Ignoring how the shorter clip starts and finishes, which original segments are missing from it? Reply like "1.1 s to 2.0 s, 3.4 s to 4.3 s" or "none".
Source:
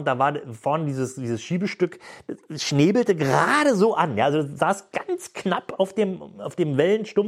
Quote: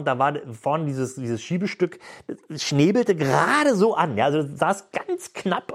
none